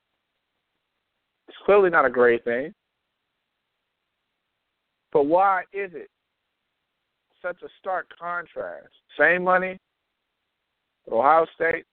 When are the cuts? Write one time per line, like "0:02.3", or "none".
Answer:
0:01.4
0:09.0